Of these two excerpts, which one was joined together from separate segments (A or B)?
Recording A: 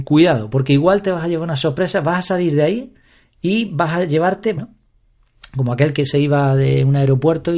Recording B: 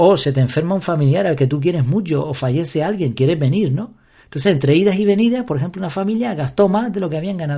A